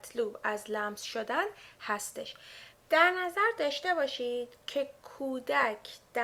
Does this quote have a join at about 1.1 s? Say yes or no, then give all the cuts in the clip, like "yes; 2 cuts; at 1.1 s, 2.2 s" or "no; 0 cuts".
no; 1 cut; at 2.7 s